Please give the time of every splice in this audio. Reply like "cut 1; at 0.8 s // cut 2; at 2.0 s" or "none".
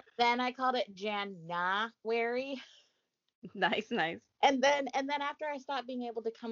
none